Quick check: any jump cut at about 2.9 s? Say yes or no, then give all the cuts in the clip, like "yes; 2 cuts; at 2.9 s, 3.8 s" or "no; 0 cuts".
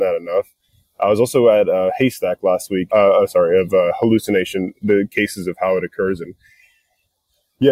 yes; 1 cut; at 2.9 s